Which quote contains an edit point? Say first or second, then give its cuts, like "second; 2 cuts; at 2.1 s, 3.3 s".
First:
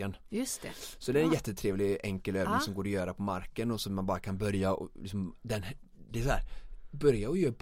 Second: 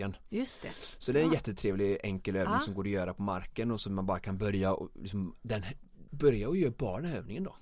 second; 1 cut; at 6.1 s